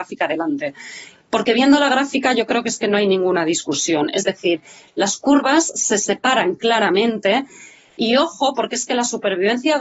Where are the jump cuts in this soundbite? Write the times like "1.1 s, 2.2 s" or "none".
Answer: none